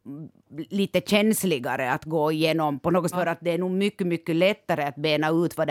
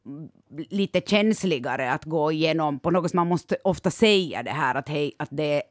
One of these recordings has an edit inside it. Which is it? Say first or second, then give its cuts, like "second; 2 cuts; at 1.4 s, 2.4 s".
first; 1 cut; at 3.1 s